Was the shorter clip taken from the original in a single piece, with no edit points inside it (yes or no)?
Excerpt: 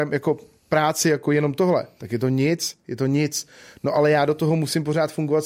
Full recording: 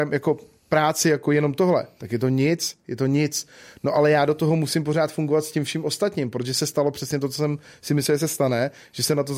yes